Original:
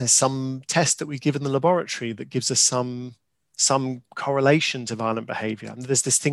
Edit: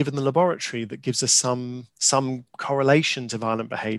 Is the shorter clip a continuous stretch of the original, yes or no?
no